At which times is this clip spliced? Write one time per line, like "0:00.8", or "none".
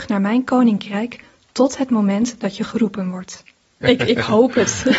0:03.8